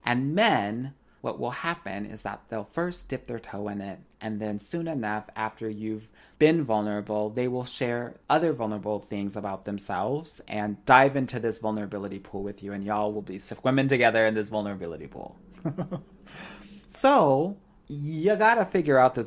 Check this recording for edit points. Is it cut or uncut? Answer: uncut